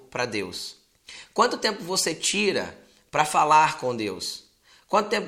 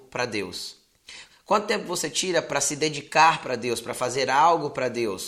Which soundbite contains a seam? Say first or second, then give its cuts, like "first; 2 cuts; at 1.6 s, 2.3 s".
second; 1 cut; at 1.3 s